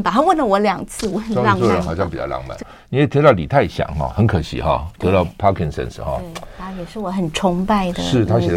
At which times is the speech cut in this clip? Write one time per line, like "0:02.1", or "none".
0:02.6